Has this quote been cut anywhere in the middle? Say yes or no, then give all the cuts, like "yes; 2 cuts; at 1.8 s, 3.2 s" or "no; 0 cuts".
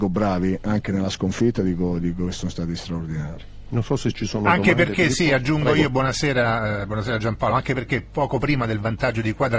no; 0 cuts